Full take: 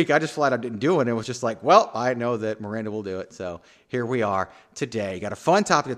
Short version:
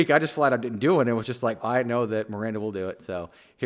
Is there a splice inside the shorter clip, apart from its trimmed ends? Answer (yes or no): yes